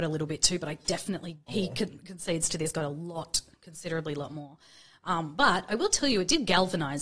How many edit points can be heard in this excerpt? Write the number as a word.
one